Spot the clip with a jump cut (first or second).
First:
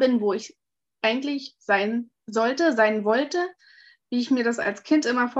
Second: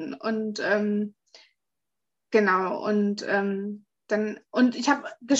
first